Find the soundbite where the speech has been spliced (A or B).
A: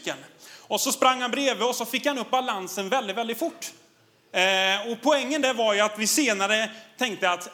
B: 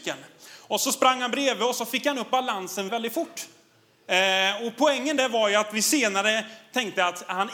B